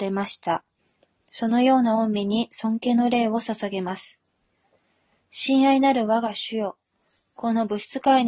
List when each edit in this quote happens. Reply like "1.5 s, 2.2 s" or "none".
none